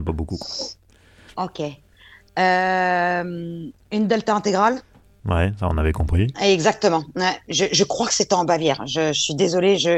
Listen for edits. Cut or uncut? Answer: cut